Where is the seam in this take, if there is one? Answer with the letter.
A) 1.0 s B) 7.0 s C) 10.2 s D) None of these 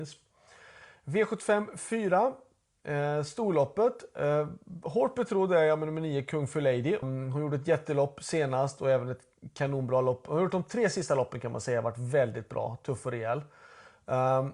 B